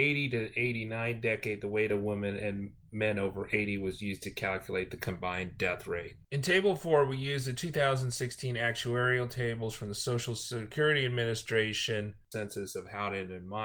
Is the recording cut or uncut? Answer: cut